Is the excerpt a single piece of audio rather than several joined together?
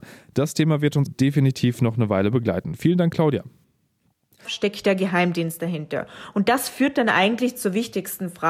no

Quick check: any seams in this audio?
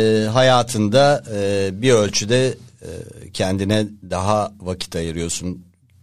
no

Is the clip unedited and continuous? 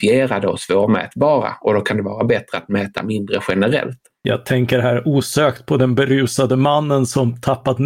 yes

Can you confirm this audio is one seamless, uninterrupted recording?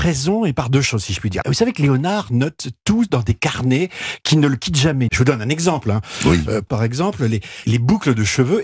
no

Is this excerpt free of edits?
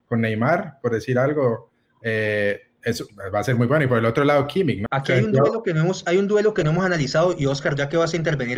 no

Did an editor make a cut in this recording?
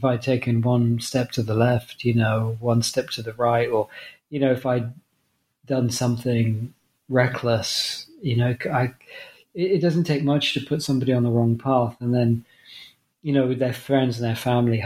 no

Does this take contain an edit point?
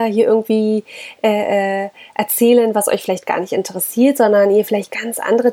no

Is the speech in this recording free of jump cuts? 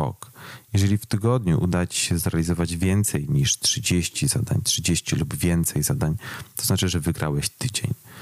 yes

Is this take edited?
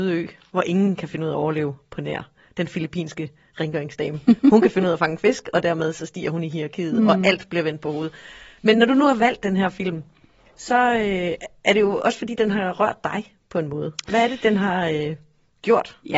no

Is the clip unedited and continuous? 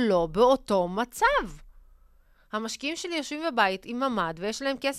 yes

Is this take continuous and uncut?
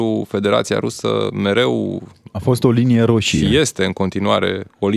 yes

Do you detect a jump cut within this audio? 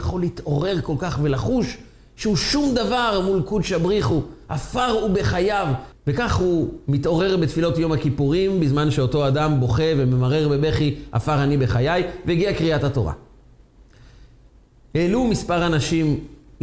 yes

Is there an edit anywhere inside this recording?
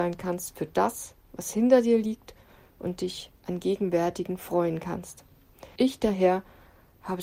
yes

